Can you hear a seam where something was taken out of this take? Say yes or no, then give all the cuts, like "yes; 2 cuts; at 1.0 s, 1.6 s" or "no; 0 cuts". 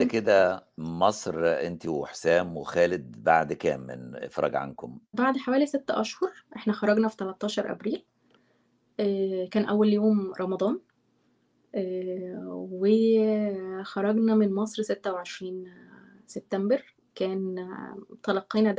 yes; 1 cut; at 5.1 s